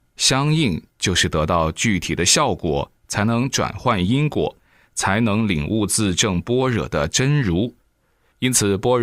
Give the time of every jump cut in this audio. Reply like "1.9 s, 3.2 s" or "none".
none